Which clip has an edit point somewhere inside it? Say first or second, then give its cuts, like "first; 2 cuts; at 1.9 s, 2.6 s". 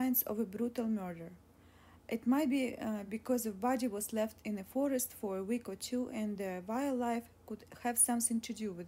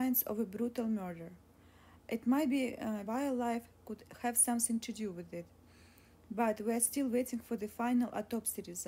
second; 1 cut; at 3.1 s